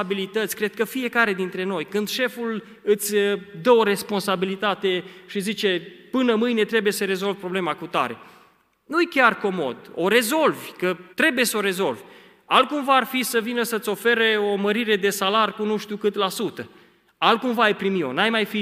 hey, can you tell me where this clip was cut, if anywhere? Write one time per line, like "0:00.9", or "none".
0:11.1